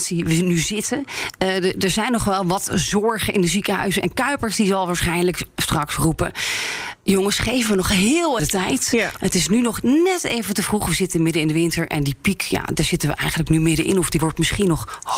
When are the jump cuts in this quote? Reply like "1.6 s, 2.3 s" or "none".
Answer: 8.4 s